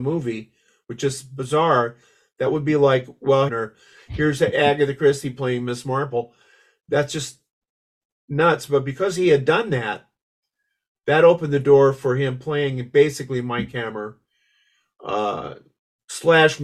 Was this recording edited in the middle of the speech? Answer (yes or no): yes